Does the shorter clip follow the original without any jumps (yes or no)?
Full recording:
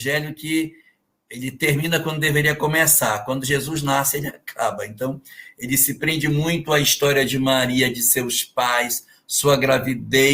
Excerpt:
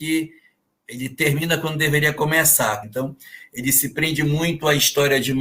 no